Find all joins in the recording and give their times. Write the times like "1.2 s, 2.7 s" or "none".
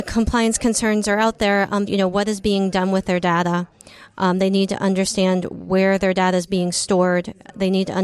1.9 s